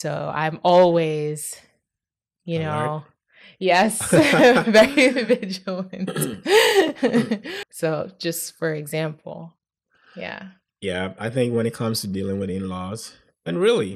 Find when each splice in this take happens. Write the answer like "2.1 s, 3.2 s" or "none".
7.6 s